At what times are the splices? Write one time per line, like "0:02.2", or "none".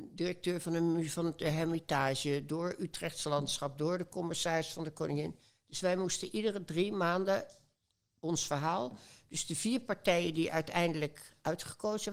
none